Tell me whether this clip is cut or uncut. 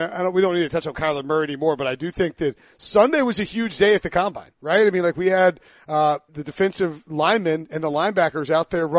cut